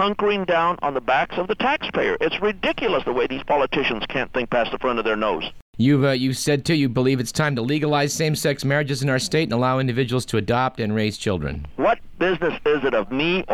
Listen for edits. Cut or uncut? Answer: cut